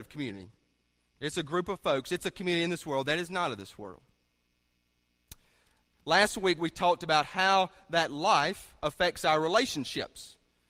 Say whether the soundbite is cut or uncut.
cut